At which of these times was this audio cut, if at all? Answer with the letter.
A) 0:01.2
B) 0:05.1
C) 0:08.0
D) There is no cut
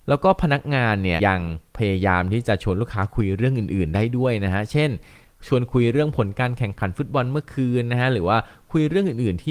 A